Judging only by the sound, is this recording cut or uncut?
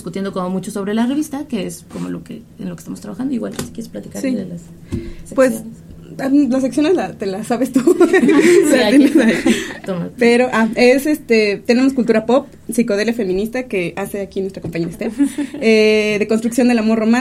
uncut